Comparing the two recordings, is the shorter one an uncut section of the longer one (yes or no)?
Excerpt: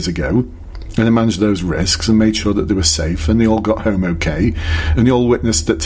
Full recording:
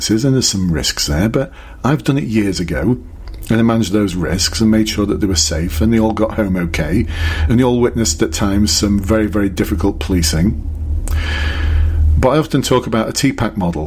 yes